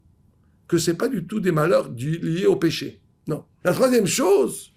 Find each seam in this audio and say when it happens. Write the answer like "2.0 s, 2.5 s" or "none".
3.6 s